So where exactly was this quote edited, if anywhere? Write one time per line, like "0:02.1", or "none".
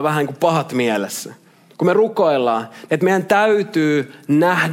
0:01.7
0:02.9